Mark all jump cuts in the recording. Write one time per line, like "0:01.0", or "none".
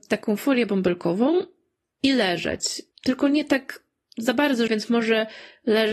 0:02.9
0:04.7